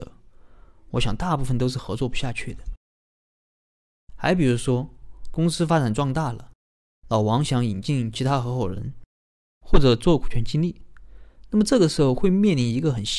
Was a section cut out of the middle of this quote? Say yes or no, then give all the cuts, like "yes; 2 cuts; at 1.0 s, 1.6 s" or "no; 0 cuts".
no; 0 cuts